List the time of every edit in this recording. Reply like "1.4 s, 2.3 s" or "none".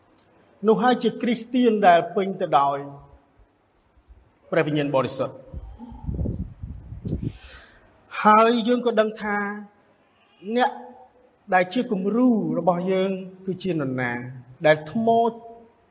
14.6 s